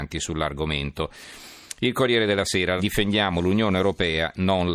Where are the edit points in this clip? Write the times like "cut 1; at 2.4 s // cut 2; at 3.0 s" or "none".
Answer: cut 1; at 2.8 s